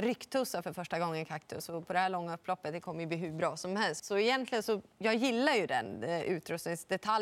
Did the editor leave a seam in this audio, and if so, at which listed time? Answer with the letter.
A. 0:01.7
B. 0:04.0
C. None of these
B